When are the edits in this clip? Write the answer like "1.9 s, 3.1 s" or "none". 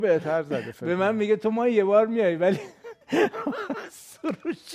3.0 s